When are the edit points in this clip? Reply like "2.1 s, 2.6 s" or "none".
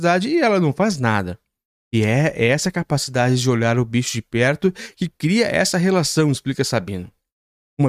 none